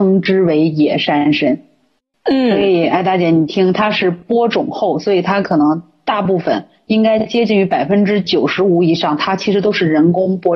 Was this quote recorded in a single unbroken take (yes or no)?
yes